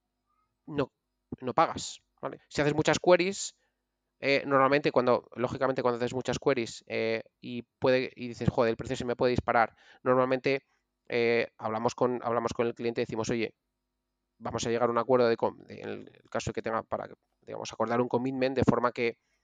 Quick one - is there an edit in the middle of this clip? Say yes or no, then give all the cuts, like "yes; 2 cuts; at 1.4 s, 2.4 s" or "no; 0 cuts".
yes; 1 cut; at 2.4 s